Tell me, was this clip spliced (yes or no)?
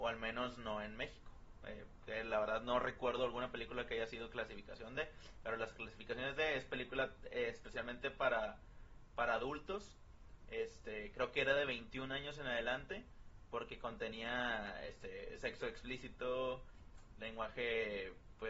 no